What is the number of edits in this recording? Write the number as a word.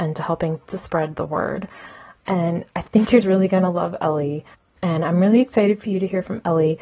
two